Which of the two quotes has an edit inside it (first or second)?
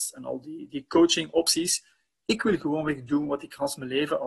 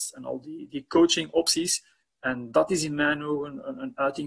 second